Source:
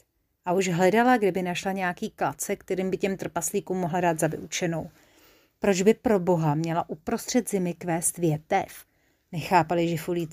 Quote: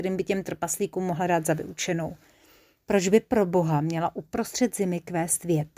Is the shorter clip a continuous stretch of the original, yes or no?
yes